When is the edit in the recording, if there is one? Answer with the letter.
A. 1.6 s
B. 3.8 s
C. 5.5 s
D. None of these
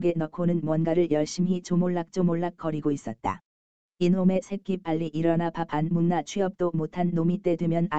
B